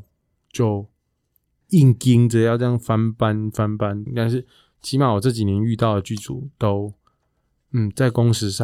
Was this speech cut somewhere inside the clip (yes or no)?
yes